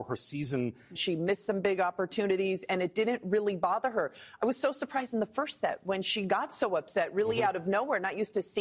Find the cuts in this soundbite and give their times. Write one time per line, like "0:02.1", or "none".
0:01.0